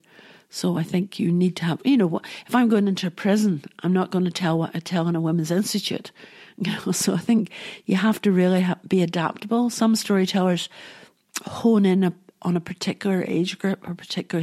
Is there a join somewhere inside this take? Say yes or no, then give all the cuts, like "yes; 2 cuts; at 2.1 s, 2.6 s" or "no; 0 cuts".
no; 0 cuts